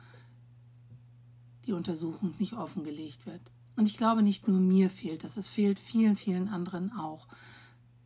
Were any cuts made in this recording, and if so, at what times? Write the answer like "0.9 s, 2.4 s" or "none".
none